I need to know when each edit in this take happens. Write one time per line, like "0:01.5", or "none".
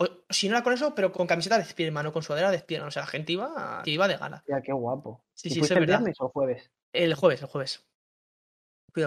0:01.1
0:03.8